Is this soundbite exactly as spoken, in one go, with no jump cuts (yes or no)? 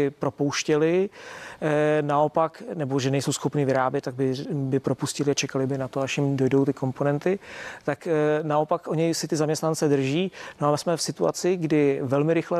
yes